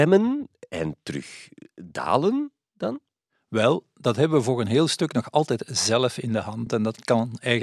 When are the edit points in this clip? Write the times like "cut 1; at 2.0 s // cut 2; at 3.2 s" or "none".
none